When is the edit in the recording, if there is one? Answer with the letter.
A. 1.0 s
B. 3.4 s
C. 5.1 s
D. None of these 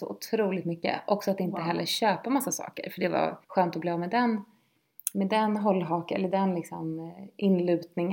B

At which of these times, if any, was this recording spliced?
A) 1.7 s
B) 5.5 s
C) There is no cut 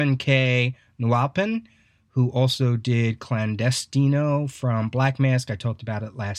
C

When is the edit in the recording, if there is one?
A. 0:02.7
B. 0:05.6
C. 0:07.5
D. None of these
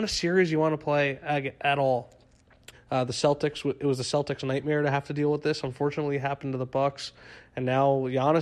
A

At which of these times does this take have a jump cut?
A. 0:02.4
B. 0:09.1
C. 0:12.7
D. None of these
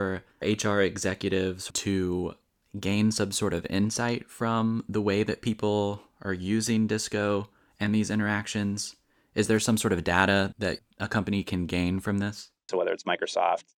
C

